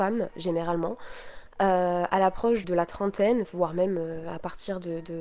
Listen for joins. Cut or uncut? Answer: cut